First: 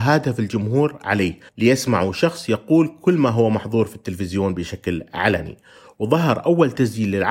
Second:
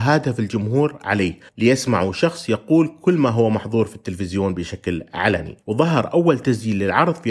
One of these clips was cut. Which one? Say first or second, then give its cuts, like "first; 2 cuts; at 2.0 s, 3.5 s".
second; 1 cut; at 5.6 s